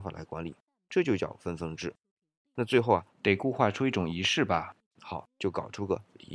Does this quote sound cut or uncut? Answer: uncut